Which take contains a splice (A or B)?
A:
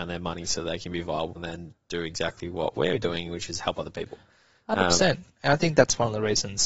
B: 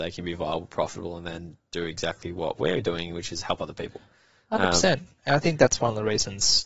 A